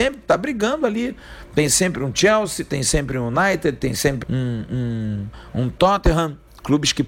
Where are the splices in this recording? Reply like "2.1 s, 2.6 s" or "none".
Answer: 4.2 s